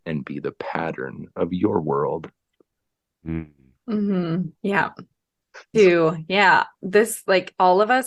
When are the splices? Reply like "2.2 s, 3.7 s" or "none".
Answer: 4.5 s, 5.7 s